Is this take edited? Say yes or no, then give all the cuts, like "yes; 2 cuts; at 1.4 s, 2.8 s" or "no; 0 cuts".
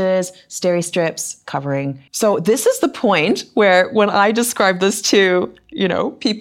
yes; 1 cut; at 2.1 s